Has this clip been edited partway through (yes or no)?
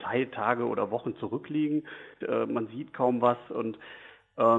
yes